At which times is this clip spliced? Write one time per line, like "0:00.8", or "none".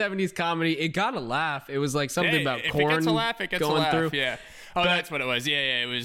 none